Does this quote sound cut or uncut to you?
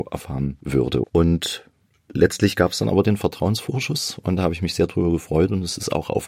cut